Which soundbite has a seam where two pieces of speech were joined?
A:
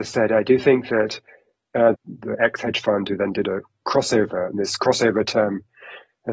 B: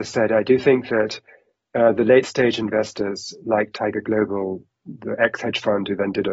A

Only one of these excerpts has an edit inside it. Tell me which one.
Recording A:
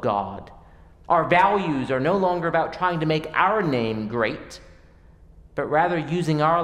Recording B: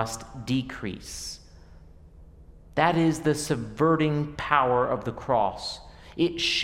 A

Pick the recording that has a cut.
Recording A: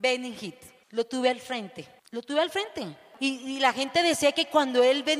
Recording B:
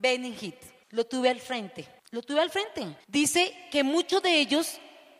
B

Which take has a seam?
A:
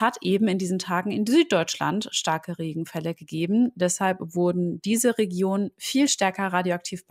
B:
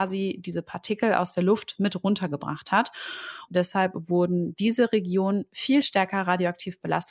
B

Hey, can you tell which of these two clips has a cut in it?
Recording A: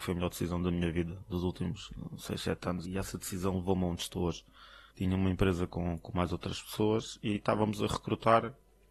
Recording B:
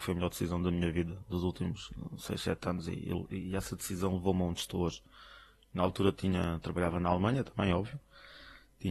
A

